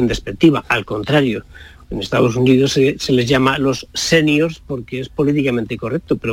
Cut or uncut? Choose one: uncut